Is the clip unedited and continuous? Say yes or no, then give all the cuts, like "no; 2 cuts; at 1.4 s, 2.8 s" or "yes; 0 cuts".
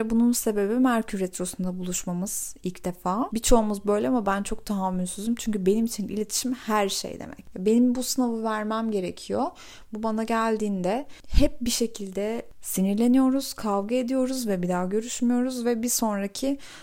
no; 3 cuts; at 3.3 s, 7.5 s, 9.9 s